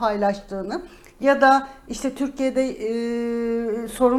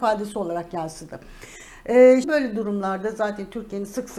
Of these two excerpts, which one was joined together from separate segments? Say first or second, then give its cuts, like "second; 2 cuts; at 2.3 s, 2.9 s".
second; 1 cut; at 2.2 s